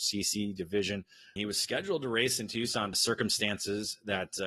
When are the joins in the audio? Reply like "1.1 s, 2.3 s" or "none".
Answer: 1.4 s, 2.9 s